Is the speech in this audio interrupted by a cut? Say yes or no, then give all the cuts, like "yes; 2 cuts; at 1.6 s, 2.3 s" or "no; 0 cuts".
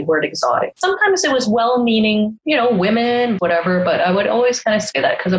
yes; 1 cut; at 3.4 s